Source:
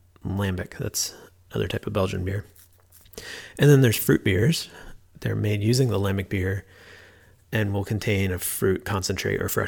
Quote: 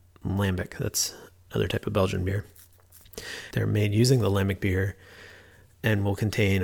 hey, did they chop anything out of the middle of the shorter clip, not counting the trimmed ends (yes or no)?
yes